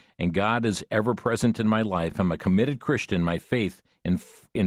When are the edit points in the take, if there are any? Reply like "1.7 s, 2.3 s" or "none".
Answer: none